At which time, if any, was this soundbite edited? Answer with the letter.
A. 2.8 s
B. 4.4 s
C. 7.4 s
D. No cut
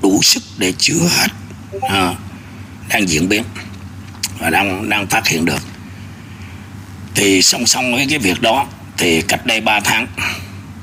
A